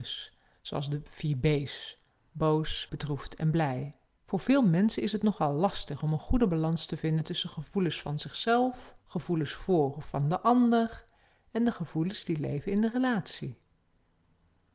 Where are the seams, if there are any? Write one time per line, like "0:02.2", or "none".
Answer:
0:02.9
0:04.2
0:09.0